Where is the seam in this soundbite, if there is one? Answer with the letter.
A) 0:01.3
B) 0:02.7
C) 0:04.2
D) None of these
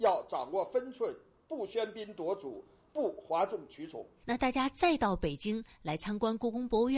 C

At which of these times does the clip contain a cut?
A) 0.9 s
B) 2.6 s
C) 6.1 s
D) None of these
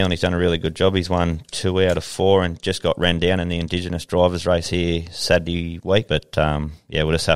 C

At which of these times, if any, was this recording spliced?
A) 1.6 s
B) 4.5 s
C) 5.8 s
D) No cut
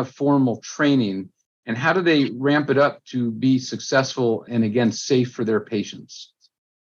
B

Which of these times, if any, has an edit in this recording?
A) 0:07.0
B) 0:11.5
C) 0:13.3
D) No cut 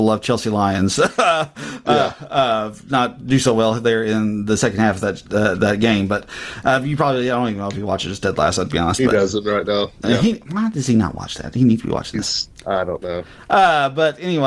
D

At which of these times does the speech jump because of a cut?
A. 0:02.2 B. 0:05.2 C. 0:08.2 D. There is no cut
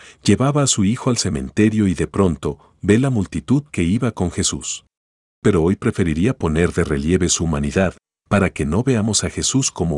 B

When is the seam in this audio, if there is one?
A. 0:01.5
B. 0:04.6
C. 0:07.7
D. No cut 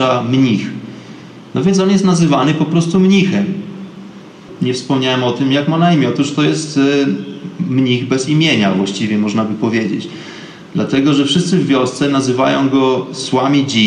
B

